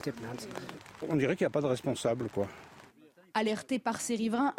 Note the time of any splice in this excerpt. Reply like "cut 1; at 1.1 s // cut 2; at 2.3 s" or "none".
cut 1; at 1.0 s